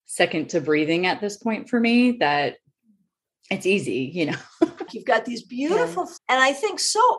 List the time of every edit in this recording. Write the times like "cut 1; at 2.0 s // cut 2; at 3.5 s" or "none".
cut 1; at 4.9 s // cut 2; at 6.2 s